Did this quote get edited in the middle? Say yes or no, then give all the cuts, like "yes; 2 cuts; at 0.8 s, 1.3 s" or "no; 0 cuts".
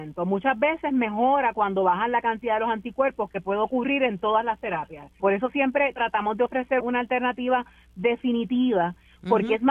yes; 2 cuts; at 5.2 s, 6.8 s